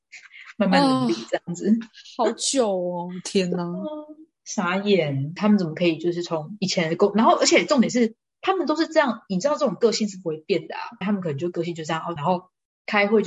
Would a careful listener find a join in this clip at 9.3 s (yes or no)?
no